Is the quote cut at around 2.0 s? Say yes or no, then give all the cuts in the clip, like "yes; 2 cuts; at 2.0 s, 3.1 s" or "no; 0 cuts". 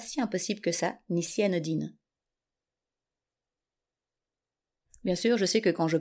no; 0 cuts